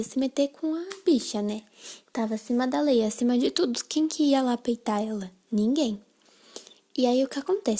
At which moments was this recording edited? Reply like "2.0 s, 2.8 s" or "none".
none